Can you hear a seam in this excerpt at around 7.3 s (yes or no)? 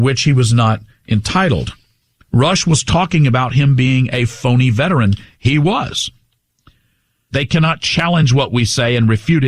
yes